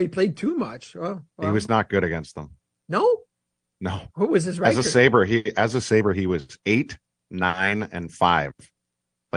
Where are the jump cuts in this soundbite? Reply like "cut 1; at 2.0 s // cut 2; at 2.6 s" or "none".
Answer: cut 1; at 4.1 s